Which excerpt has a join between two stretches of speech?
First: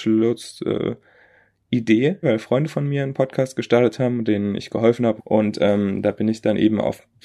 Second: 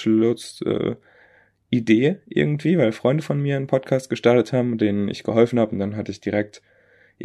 first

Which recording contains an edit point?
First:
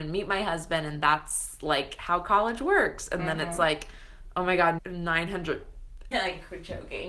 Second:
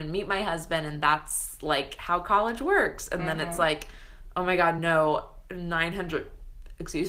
first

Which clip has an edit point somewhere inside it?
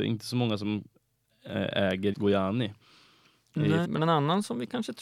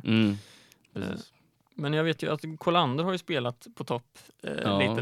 first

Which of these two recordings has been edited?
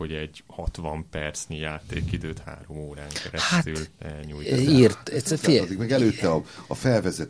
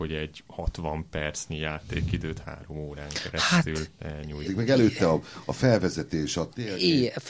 second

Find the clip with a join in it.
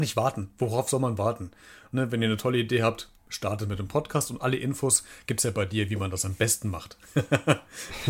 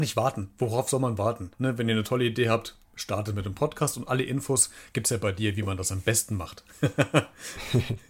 second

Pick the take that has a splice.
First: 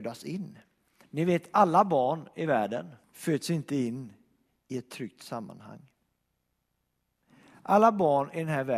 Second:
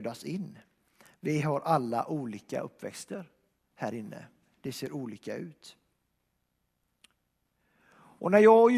first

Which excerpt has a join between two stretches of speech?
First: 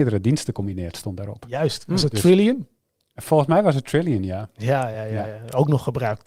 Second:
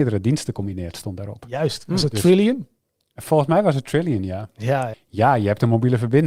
second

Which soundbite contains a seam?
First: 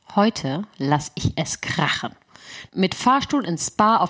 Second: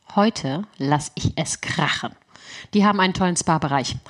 first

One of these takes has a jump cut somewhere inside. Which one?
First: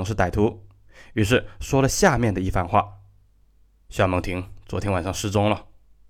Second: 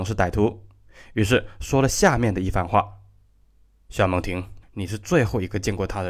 second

